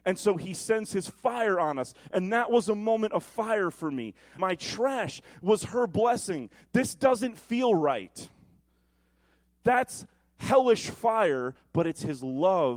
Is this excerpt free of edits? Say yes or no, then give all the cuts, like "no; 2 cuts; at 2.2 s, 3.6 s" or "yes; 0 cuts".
no; 1 cut; at 4.4 s